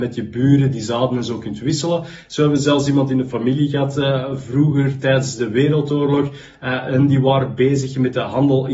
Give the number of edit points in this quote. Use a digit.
0